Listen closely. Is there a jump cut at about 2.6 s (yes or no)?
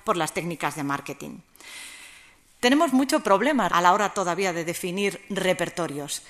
yes